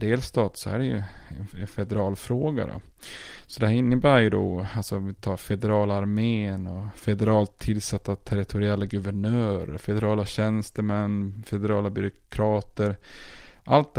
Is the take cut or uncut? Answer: uncut